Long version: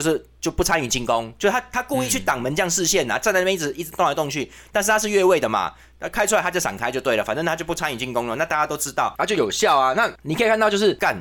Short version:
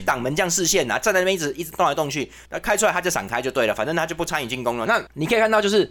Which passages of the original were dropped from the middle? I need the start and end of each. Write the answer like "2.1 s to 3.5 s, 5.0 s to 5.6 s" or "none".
4.6 s to 5.9 s, 8.4 s to 9.9 s